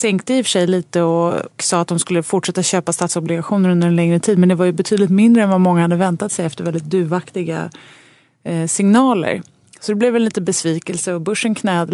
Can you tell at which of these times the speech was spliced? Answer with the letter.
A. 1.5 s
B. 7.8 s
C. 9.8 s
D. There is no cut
A